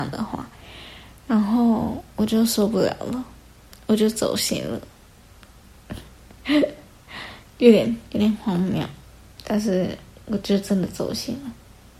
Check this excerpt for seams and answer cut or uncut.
uncut